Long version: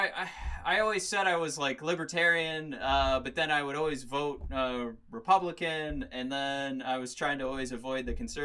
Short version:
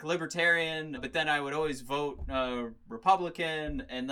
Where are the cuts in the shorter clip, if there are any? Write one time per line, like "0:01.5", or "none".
0:01.0